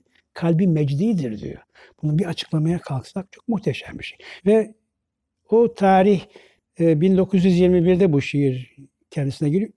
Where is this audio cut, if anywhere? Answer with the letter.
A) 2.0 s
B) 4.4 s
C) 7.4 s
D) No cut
B